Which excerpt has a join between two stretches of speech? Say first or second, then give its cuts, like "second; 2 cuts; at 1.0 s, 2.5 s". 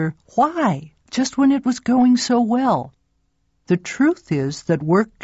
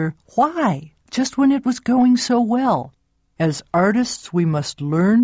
second; 1 cut; at 3.3 s